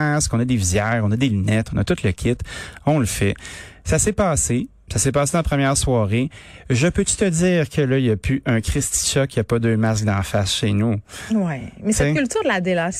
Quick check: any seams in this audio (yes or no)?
no